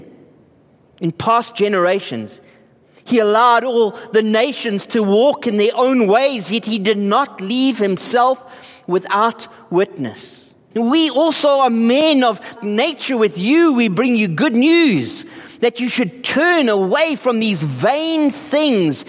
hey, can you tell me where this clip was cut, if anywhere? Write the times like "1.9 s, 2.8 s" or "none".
10.7 s, 12.6 s